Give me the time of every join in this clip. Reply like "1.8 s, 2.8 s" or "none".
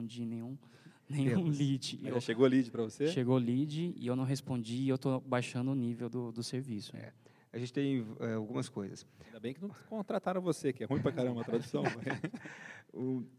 none